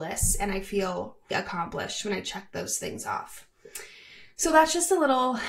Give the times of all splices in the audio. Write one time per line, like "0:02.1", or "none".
0:01.3